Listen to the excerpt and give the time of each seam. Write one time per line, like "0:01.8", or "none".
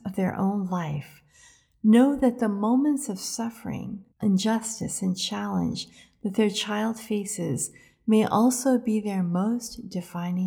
0:04.1